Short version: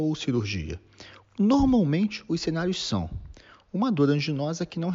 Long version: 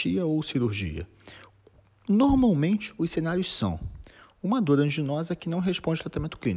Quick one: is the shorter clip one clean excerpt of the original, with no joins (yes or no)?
no